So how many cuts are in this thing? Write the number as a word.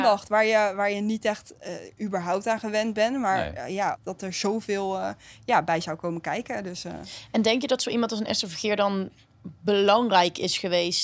one